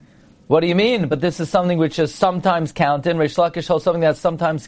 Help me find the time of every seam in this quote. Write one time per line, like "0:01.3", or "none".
none